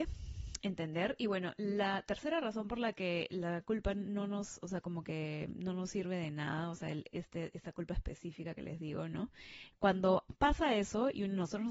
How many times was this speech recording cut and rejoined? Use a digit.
1